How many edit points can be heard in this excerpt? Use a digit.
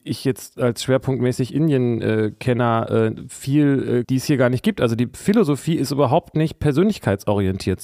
1